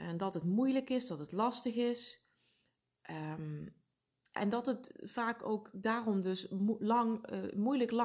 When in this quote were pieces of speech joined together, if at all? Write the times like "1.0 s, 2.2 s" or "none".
4.4 s